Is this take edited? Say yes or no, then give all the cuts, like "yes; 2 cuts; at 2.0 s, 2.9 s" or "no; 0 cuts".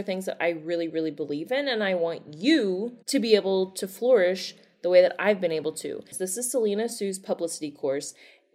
yes; 2 cuts; at 3.0 s, 6.1 s